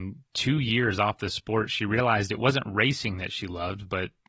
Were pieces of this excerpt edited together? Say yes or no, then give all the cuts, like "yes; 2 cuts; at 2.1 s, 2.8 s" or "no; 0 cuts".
no; 0 cuts